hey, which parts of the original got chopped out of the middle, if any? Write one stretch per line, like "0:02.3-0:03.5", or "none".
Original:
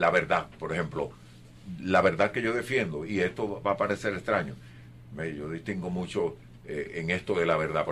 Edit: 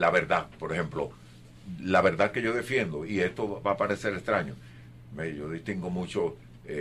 none

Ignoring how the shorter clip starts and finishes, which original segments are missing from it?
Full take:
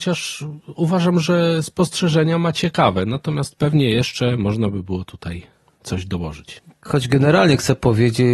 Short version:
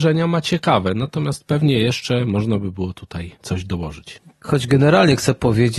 0:05.5-0:05.8

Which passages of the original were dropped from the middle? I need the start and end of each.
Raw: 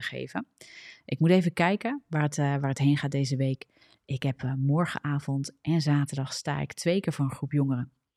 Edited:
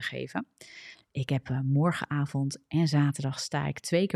0:00.9-0:03.9

